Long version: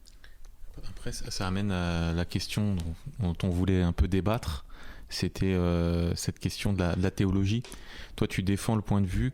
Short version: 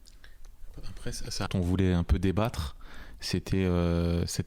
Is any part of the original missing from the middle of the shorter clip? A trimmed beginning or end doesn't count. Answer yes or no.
yes